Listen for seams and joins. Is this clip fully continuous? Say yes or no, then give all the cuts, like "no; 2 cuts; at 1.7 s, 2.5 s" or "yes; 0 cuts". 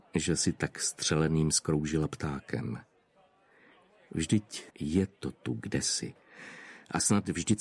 no; 1 cut; at 4.7 s